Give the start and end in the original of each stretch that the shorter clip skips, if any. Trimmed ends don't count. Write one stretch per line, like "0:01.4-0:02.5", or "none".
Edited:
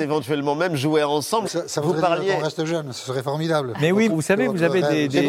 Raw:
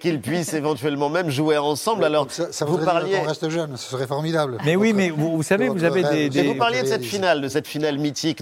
0:02.0-0:02.3
0:04.9-0:05.3